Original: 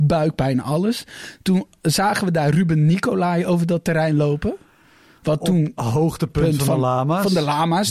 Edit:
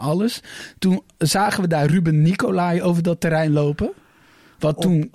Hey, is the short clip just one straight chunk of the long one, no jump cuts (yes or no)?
yes